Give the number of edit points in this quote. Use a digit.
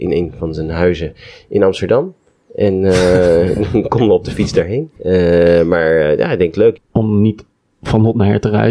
2